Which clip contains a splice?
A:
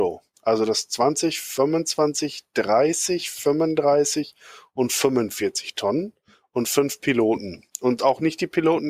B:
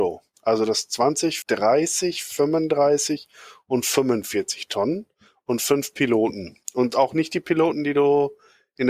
B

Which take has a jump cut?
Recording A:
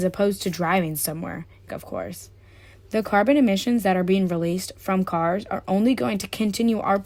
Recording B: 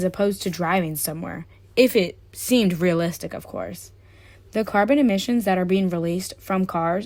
A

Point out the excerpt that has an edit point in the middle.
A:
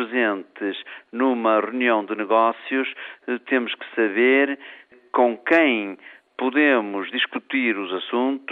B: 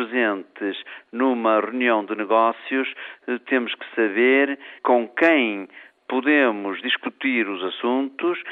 B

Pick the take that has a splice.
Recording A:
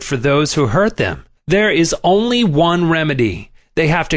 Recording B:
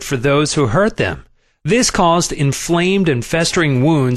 A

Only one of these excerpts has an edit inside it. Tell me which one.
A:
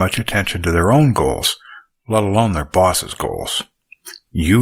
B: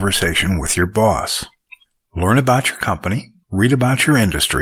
B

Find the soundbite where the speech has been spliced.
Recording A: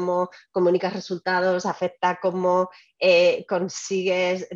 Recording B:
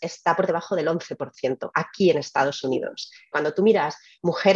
B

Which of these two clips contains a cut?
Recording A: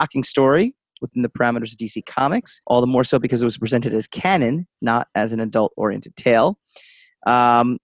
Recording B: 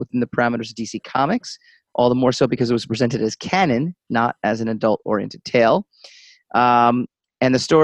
A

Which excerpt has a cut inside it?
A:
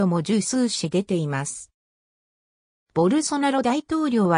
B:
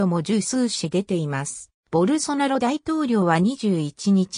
B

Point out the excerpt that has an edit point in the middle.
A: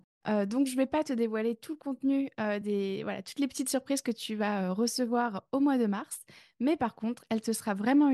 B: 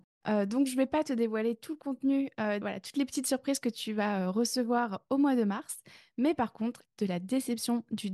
B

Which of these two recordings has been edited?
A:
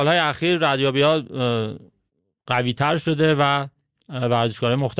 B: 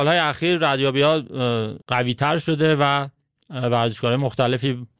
B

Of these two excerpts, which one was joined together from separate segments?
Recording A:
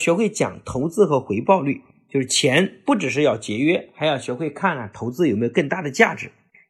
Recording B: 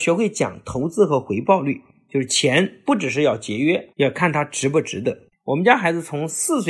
B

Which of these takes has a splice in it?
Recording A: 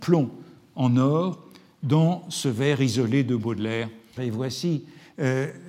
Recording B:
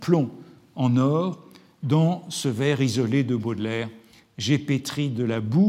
A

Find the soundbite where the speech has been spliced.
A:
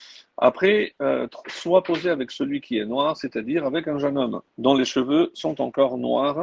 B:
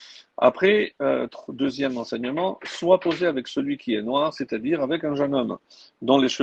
A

